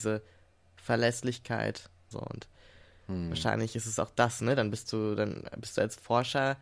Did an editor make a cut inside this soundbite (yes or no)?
yes